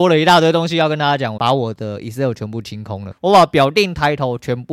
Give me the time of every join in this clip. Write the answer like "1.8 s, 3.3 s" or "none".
1.4 s, 3.1 s